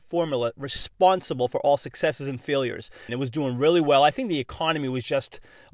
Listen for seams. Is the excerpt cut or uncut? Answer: cut